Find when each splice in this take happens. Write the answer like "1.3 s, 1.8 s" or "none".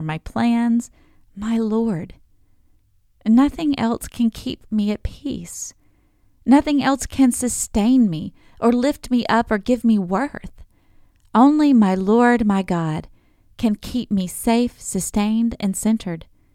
none